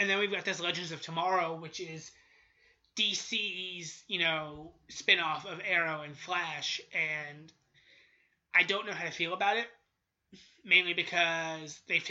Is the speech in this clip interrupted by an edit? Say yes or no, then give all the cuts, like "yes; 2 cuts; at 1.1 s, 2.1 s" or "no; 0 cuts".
no; 0 cuts